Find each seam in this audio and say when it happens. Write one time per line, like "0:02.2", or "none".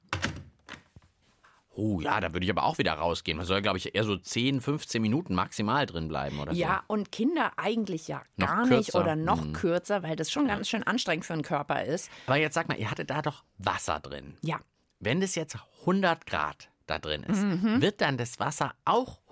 none